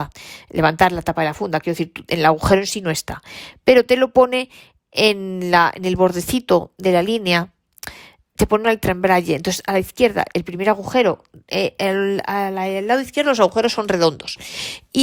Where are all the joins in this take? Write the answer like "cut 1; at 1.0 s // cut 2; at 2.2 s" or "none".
none

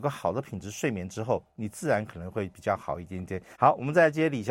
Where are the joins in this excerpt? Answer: cut 1; at 3.5 s

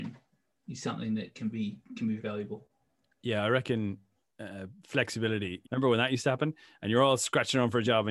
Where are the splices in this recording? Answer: cut 1; at 2.2 s // cut 2; at 5.6 s

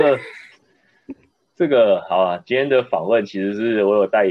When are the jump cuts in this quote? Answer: none

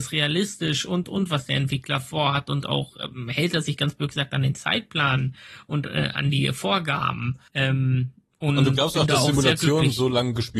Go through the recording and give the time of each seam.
cut 1; at 1.0 s // cut 2; at 7.5 s

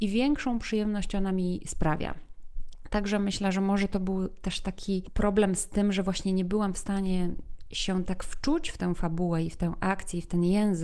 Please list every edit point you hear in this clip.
none

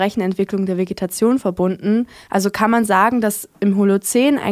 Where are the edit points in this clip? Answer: none

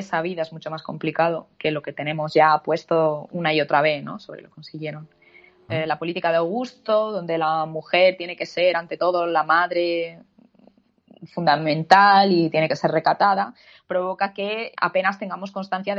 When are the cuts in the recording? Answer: cut 1; at 5.7 s // cut 2; at 14.7 s

